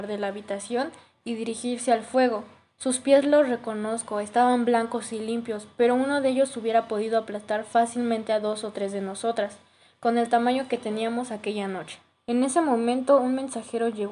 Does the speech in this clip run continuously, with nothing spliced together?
no; 1 cut; at 12.1 s

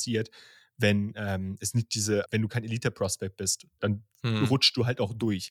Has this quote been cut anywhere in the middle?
yes; 1 cut; at 2.3 s

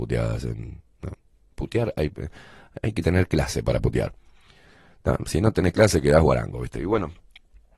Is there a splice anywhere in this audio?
no; 0 cuts

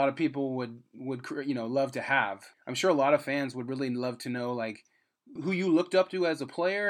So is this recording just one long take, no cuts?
no; 2 cuts; at 2.5 s, 5.4 s

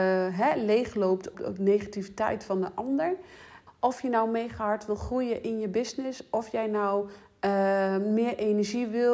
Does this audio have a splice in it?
yes; 2 cuts; at 1.3 s, 3.7 s

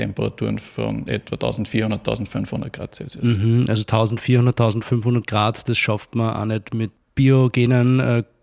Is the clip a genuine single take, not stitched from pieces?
yes; 0 cuts

